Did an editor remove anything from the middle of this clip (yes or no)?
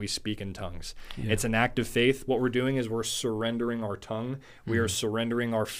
no